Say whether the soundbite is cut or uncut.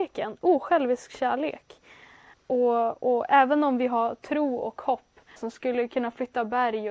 cut